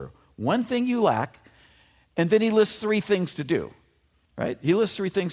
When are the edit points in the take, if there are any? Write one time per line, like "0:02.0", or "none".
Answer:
0:04.2